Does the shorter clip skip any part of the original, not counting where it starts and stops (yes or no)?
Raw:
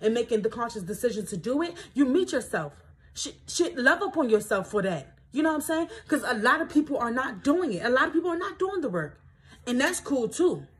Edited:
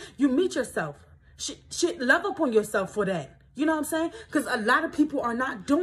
no